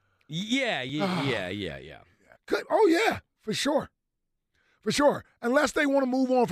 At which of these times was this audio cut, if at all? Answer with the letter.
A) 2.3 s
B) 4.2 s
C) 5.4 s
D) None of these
A